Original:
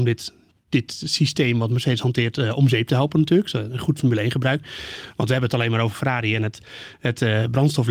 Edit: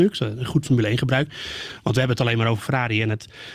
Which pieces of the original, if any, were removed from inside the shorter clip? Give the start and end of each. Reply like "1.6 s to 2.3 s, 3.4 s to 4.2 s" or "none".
none